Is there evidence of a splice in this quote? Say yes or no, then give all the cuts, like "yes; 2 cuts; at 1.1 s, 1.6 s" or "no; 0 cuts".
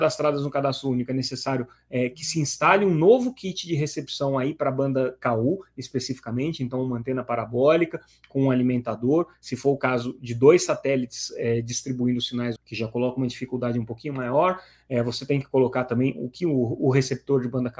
yes; 1 cut; at 12.6 s